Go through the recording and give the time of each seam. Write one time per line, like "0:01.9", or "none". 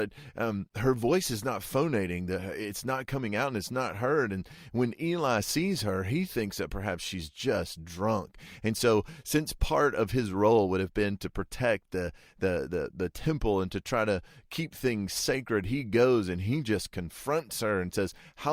none